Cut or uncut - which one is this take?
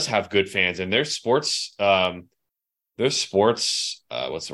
uncut